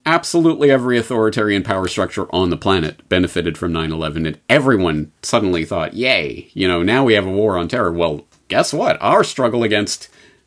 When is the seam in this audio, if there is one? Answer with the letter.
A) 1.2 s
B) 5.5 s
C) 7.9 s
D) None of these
D